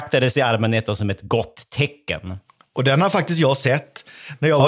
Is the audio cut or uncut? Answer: uncut